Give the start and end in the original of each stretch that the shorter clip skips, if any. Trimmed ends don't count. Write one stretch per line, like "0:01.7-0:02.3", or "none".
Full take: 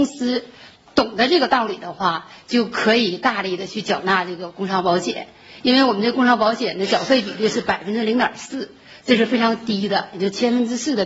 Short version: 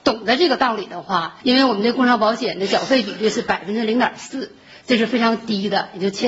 0:02.3-0:05.6